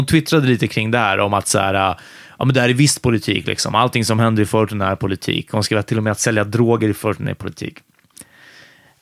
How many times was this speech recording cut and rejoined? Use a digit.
0